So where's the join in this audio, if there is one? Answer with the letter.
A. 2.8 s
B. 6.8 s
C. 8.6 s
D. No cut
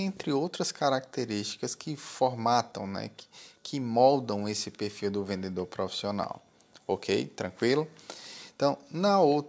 D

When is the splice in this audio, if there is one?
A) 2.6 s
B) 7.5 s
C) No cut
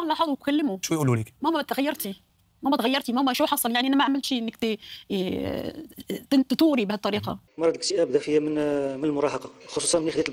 B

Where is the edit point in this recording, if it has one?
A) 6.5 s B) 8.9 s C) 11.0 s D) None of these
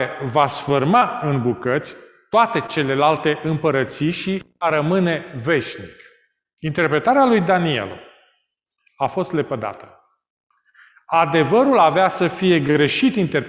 D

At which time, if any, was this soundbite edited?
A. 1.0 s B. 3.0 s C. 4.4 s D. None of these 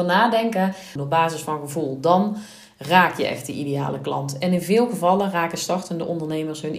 A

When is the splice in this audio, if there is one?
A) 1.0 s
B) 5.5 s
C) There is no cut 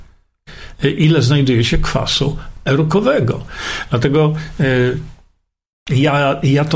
C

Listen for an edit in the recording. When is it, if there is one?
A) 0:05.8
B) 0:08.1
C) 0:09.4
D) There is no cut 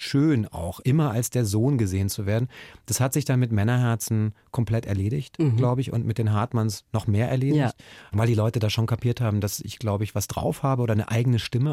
D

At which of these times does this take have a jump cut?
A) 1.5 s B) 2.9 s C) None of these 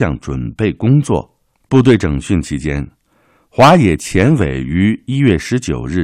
A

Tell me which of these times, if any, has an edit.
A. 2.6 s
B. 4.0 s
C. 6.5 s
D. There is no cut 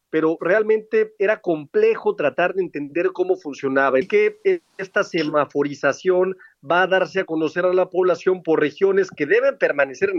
B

